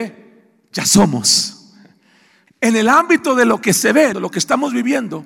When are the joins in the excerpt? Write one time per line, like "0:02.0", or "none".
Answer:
0:02.5
0:04.1